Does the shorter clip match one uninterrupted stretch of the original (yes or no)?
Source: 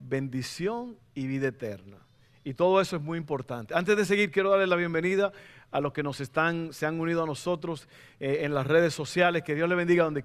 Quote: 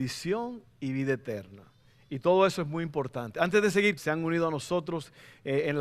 no